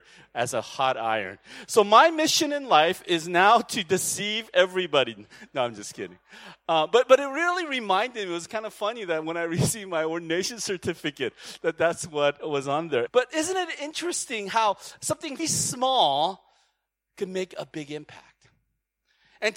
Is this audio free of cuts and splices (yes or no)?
no